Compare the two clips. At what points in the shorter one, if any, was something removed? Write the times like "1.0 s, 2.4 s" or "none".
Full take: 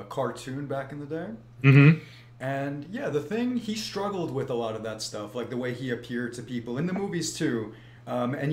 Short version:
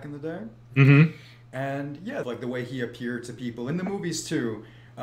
2.2 s